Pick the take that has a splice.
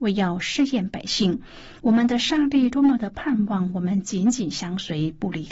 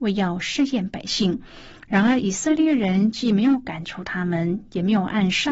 first; 1 cut; at 1.8 s

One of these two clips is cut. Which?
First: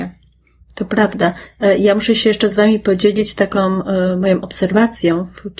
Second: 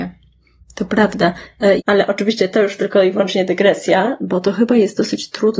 second; 2 cuts; at 1.8 s, 4.2 s

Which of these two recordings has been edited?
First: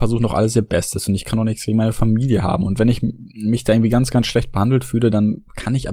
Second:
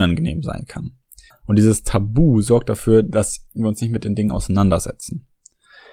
second; 1 cut; at 1.3 s

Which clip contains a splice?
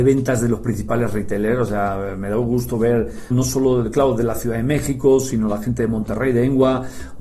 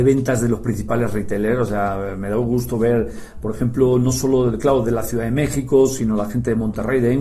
first; 1 cut; at 3.3 s

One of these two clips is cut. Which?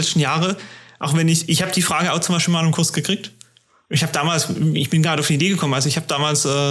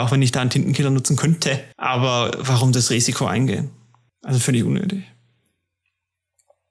second; 1 cut; at 1.7 s

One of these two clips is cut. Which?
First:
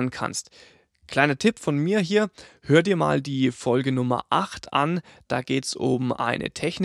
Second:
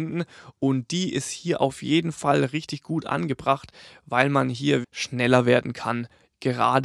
second; 1 cut; at 4.8 s

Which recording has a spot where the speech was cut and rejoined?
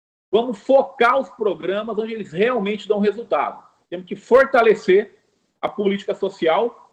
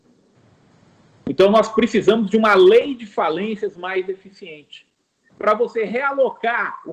first; 1 cut; at 3.9 s

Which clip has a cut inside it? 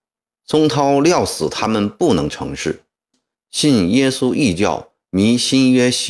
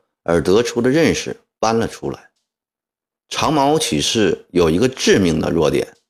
first; 1 cut; at 3.1 s

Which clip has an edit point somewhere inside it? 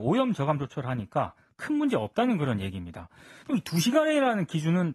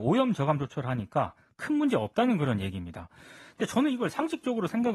first; 1 cut; at 3.4 s

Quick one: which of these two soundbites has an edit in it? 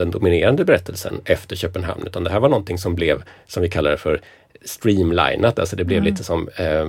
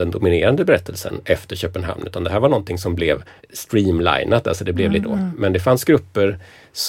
second; 2 cuts; at 3.4 s, 5.0 s

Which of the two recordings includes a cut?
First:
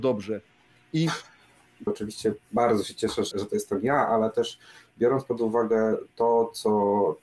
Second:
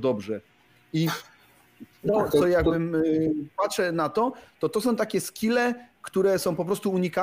first; 2 cuts; at 1.9 s, 3.3 s

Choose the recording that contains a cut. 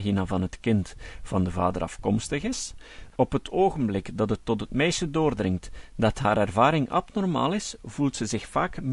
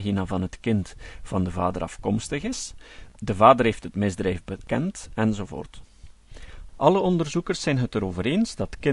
first; 1 cut; at 3.1 s

